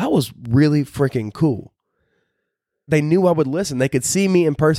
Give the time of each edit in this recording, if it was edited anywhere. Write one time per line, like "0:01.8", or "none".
0:02.9